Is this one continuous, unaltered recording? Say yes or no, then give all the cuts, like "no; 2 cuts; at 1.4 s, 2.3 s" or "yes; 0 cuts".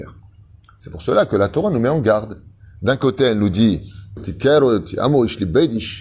no; 1 cut; at 4.2 s